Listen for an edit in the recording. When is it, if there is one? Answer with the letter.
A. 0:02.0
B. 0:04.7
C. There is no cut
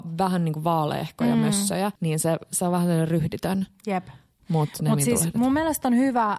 A